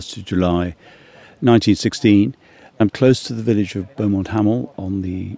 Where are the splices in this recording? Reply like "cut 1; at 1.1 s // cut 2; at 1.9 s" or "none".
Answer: none